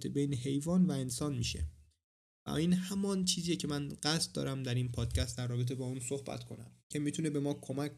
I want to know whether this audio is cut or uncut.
cut